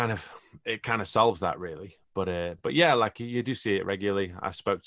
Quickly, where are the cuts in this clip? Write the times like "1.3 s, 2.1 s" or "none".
none